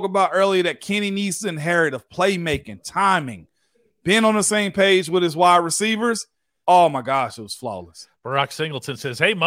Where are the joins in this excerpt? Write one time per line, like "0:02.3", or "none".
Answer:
0:06.6